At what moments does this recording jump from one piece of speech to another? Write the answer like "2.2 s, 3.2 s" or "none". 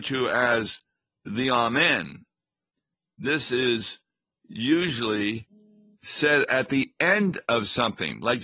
none